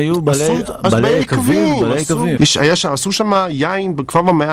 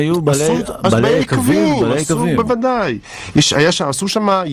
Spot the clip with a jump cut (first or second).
first